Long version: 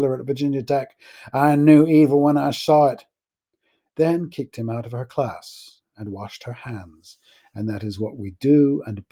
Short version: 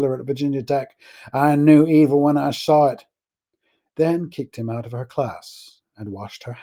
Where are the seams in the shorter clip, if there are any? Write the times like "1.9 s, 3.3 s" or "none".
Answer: none